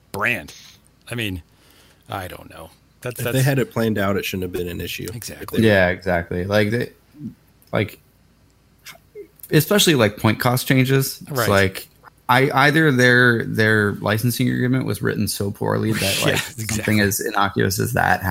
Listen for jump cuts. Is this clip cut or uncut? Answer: uncut